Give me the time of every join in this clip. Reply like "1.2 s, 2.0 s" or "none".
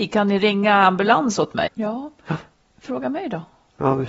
1.7 s